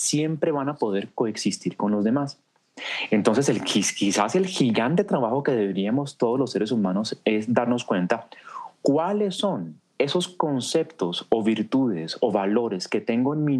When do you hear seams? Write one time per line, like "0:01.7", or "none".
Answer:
none